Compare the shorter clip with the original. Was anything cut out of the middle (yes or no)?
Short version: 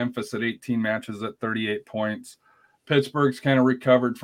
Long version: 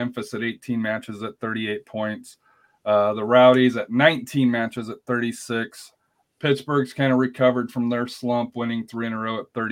yes